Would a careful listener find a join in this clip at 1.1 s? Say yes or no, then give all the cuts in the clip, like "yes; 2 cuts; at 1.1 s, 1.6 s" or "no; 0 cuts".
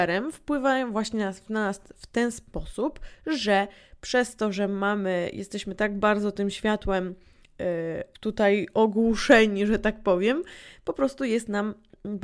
no; 1 cut; at 8.1 s